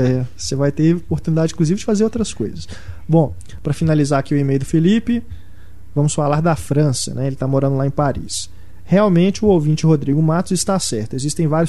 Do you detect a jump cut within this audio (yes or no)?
no